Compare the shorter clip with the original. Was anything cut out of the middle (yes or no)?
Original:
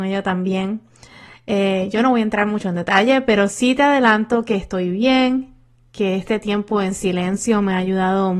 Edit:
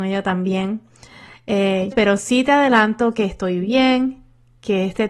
yes